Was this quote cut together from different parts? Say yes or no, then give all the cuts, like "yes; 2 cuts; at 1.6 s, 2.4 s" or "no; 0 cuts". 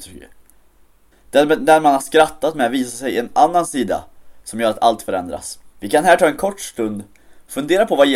yes; 2 cuts; at 1.1 s, 5.7 s